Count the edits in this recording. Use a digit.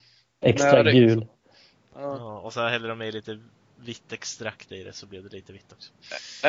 0